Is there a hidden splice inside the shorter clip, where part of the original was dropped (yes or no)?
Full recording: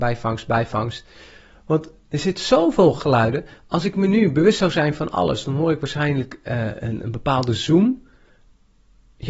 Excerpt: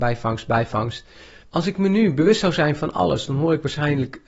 yes